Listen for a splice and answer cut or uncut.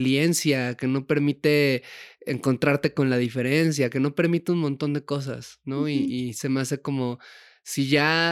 uncut